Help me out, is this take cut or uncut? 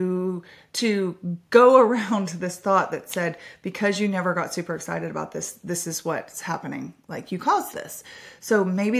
uncut